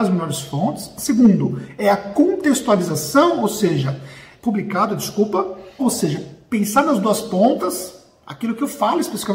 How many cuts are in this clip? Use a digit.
2